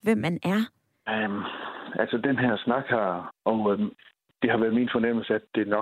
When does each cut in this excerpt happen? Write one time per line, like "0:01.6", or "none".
0:01.1
0:03.3